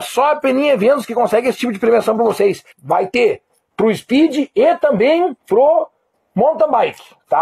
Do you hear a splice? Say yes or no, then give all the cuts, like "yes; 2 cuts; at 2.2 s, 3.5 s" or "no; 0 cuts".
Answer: yes; 2 cuts; at 2.7 s, 5.4 s